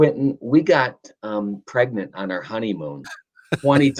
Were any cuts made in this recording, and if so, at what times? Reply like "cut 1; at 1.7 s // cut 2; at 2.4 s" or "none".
cut 1; at 3.0 s